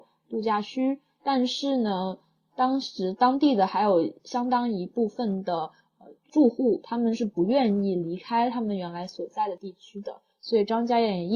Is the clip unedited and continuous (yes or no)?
yes